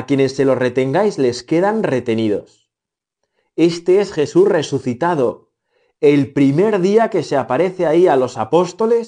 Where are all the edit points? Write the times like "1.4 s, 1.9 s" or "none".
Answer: none